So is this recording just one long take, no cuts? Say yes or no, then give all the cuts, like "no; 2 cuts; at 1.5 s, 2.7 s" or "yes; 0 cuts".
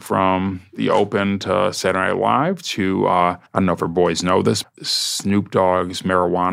no; 2 cuts; at 3.5 s, 4.6 s